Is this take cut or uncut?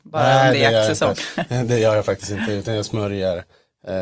uncut